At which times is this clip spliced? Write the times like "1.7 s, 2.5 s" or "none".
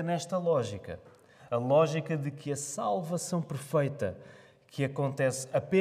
none